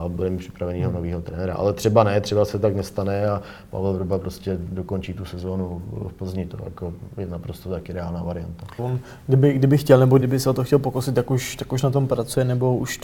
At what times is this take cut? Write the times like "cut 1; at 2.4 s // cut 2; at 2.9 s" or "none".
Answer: cut 1; at 8.8 s // cut 2; at 10.2 s